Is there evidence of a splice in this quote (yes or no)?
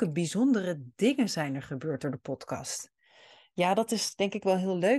no